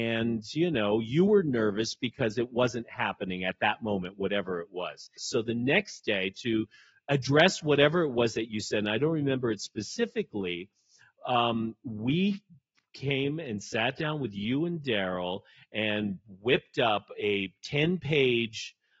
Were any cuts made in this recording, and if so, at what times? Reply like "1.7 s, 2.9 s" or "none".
5.2 s